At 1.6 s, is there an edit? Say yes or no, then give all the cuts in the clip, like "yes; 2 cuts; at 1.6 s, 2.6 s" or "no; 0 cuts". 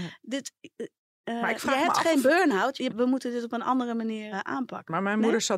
no; 2 cuts; at 2.9 s, 4.3 s